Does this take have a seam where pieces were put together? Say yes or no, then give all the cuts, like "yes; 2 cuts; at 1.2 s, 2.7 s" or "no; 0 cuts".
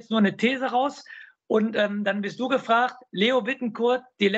no; 0 cuts